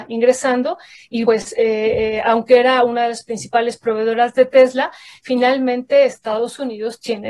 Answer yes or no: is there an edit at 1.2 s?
yes